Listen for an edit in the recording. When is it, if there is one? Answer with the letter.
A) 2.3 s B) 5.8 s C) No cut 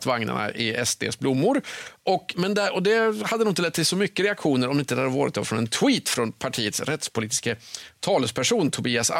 A